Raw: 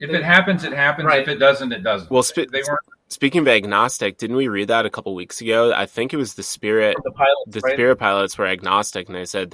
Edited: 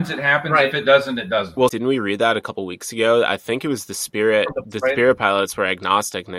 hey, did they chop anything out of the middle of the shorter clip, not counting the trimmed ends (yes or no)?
yes